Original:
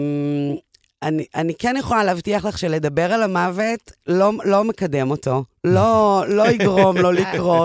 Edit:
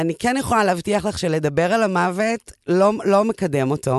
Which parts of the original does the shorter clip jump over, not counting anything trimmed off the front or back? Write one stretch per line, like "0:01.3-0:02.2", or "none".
none